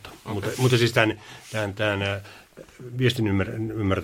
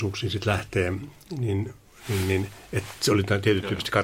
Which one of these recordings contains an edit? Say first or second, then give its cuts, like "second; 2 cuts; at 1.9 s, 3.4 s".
first; 1 cut; at 2.9 s